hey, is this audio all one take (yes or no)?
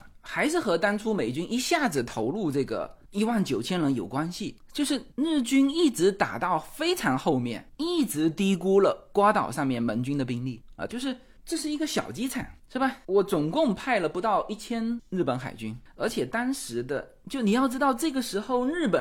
no